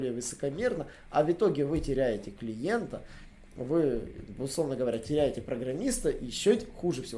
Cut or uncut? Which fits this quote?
uncut